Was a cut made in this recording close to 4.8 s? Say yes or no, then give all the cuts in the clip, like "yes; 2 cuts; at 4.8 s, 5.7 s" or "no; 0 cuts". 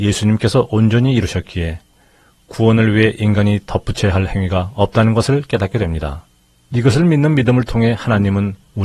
no; 1 cut; at 6.6 s